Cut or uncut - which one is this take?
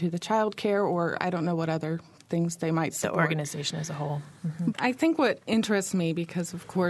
cut